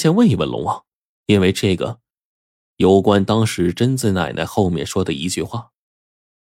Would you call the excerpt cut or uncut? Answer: uncut